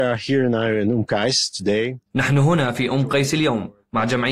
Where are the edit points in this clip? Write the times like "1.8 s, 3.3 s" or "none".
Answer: 2.1 s

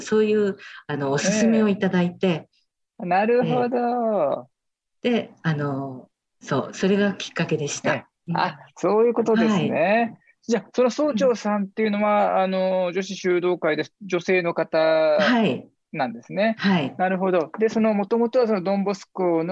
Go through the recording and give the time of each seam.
none

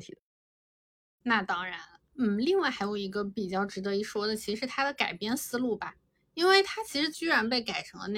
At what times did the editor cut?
7.1 s

